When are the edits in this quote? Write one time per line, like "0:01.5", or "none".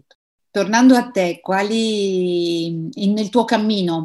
none